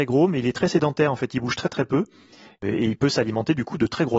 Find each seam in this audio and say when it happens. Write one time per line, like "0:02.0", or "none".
none